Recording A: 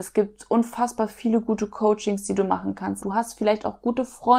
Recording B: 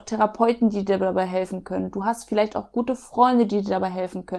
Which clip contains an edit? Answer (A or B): A